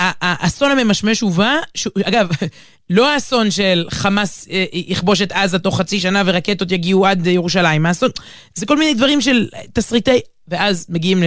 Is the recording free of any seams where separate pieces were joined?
yes; 0 cuts

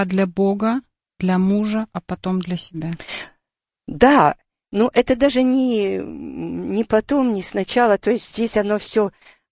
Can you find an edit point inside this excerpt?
no; 0 cuts

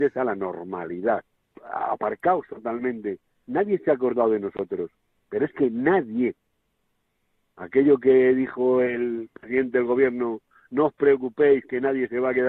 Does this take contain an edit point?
yes; 1 cut; at 1.5 s

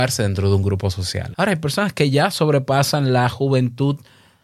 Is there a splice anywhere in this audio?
yes; 1 cut; at 1.3 s

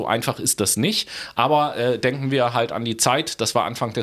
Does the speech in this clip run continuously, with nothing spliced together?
yes; 0 cuts

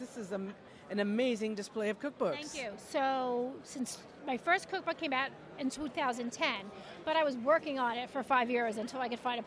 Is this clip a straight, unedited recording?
yes; 0 cuts

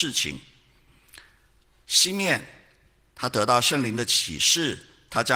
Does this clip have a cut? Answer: no; 0 cuts

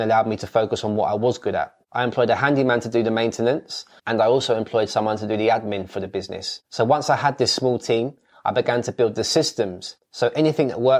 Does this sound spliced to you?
yes; 1 cut; at 4.0 s

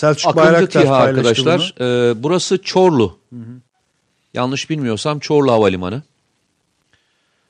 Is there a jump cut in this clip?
no; 0 cuts

